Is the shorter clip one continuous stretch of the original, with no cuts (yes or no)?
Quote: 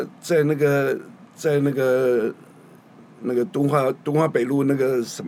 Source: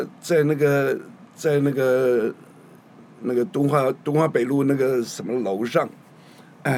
yes